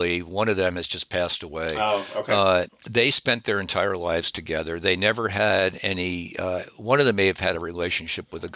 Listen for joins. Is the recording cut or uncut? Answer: uncut